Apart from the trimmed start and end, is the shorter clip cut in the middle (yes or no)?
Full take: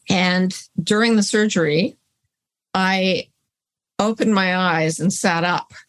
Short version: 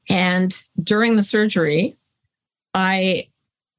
no